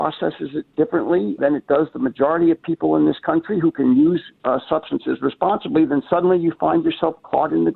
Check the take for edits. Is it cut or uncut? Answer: cut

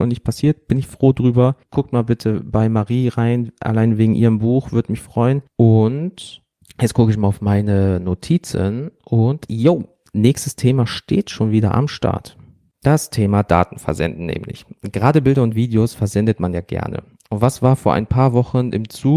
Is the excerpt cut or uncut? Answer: cut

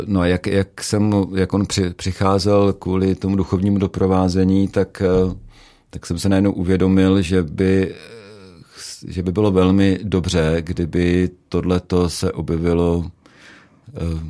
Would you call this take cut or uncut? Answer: uncut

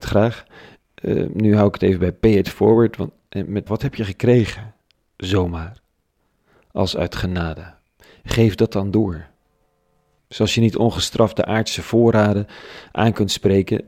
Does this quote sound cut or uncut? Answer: cut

